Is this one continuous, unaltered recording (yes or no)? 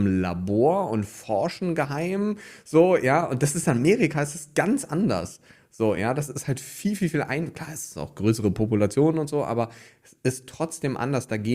yes